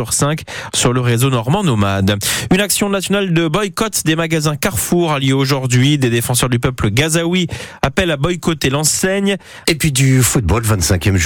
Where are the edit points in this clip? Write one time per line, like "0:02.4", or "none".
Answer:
0:09.6

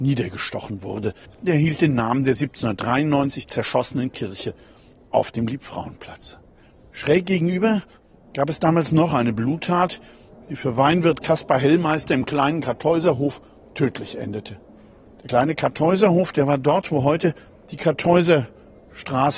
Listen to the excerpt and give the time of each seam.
0:01.2

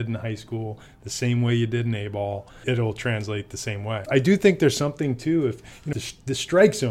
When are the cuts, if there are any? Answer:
0:02.6
0:04.0
0:05.9

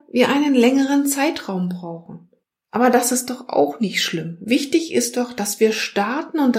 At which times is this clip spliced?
none

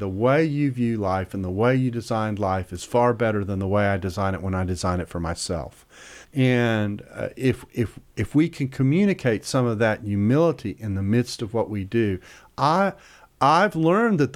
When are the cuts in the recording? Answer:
0:06.2

